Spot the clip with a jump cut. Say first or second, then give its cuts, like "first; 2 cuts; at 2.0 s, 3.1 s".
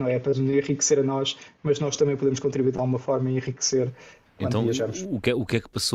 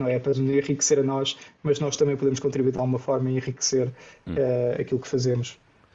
first; 1 cut; at 4.3 s